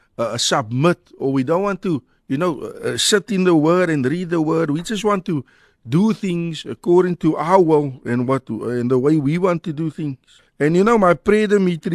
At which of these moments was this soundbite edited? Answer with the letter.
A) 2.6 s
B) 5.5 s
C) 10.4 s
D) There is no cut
C